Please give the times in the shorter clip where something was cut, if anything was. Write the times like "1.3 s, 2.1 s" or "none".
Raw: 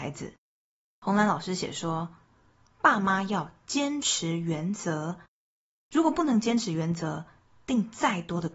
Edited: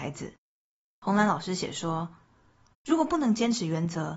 2.7 s